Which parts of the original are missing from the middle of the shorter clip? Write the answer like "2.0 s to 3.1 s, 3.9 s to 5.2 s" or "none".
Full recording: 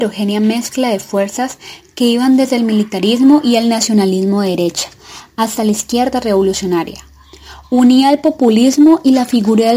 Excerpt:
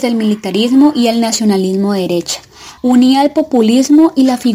5.3 s to 7.7 s